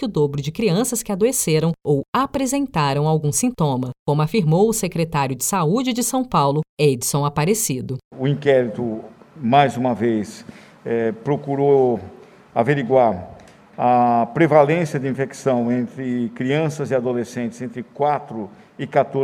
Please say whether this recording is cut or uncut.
uncut